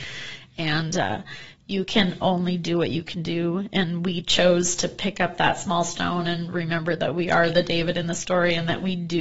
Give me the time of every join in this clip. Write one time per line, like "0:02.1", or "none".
none